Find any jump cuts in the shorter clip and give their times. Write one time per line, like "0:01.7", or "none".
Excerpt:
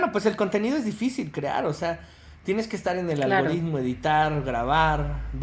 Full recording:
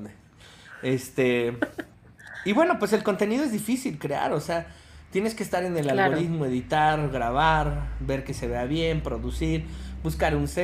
none